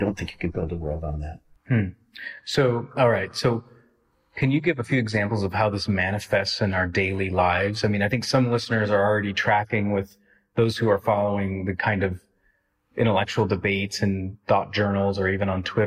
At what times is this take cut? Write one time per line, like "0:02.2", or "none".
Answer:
none